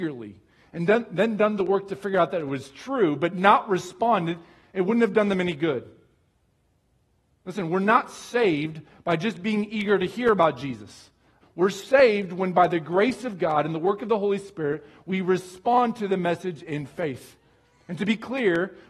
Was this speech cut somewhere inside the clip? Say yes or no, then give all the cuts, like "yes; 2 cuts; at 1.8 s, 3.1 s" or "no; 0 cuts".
yes; 1 cut; at 11.4 s